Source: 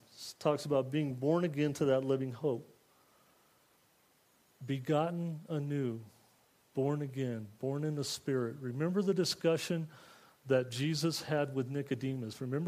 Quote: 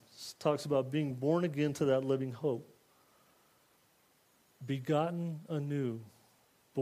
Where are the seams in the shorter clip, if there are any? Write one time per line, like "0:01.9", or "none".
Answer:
none